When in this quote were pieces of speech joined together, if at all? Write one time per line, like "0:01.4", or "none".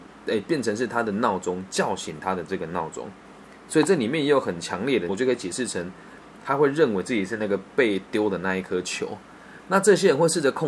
0:05.1
0:06.4

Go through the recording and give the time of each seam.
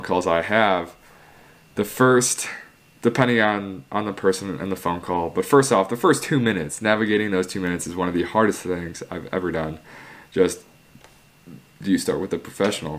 none

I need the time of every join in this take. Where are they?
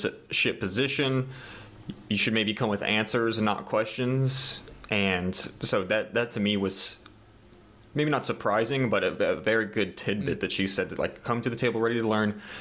none

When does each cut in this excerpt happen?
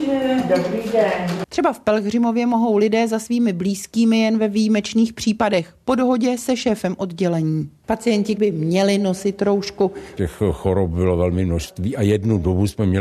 0:08.4
0:10.2

